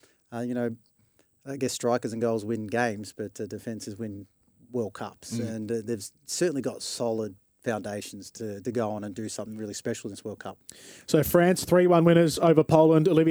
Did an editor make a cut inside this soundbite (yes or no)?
no